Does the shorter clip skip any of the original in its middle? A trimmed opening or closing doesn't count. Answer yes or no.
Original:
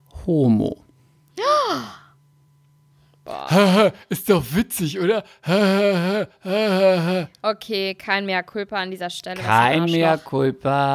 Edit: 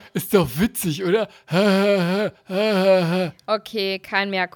no